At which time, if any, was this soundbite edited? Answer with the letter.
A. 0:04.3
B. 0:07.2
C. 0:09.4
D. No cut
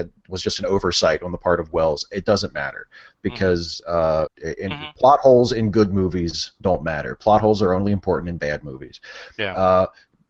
A